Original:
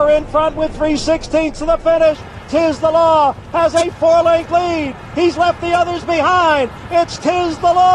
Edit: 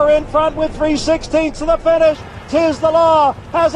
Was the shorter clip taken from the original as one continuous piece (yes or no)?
yes